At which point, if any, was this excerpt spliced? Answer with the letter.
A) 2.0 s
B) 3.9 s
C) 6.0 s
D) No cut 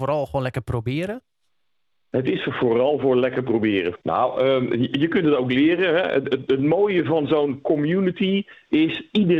B